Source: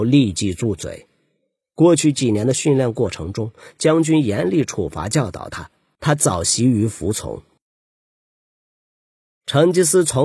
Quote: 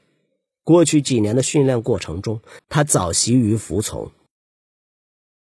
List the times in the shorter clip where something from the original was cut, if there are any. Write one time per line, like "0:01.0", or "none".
0:02.6